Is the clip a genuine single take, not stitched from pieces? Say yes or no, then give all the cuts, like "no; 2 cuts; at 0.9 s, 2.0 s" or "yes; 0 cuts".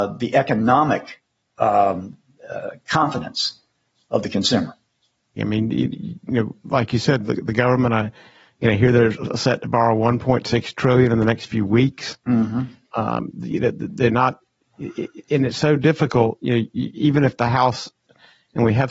no; 1 cut; at 5.4 s